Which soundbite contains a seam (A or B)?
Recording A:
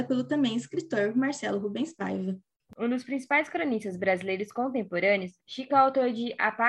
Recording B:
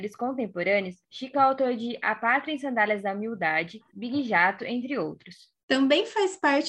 B